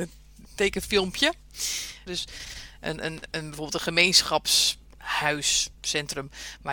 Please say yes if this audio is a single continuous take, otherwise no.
no